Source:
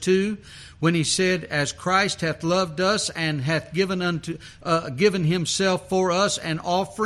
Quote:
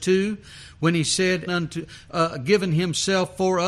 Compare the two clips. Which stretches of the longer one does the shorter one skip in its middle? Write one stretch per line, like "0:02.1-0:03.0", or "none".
0:01.5-0:04.0